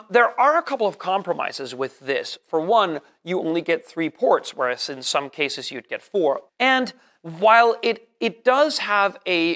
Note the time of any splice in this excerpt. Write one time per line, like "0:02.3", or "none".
0:06.5

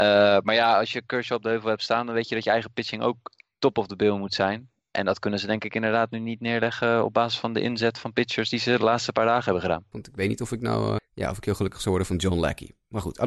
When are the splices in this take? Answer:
0:09.9
0:11.0

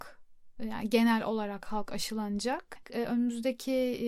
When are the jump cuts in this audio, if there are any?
0:02.8

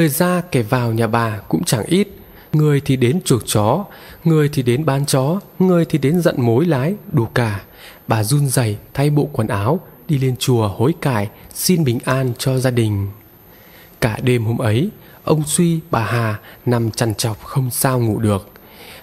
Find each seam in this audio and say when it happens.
none

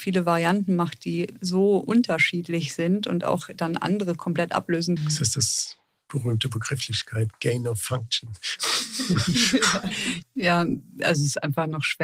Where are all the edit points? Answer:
0:05.0
0:10.2

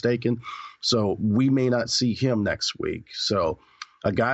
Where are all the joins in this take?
none

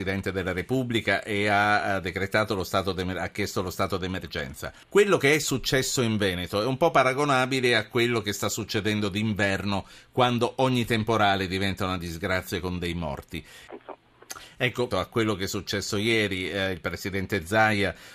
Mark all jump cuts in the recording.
0:04.8
0:13.7
0:14.9

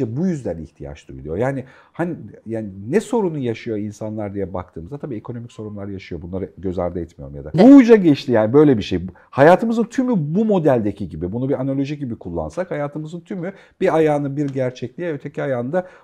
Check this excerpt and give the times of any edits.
0:07.5

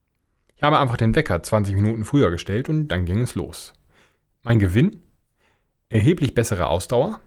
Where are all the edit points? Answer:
none

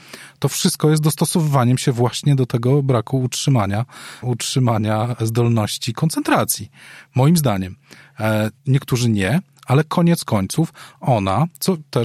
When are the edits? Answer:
0:04.2
0:08.6

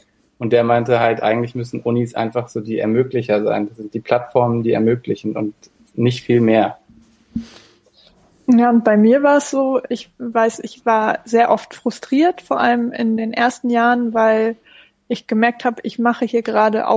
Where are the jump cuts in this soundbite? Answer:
none

